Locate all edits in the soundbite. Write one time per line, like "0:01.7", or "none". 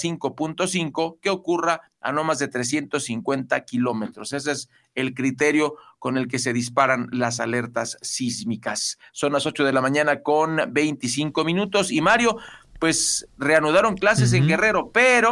none